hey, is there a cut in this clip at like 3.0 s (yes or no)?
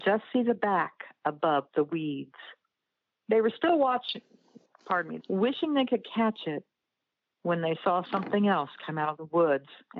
no